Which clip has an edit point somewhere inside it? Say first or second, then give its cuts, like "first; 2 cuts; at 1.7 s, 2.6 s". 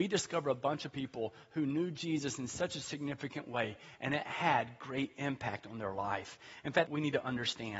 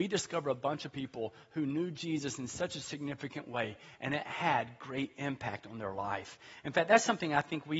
first; 1 cut; at 6.9 s